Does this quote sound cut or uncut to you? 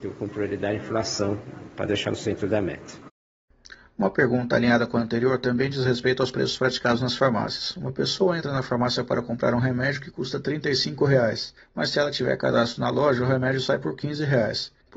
uncut